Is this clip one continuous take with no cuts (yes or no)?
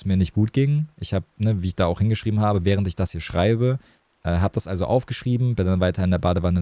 yes